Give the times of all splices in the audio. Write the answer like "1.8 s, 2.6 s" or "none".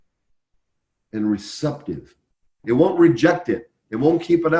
2.6 s